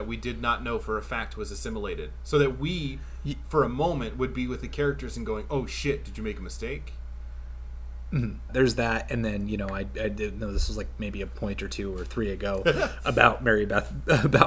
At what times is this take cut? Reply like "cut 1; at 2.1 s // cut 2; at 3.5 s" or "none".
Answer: cut 1; at 8.5 s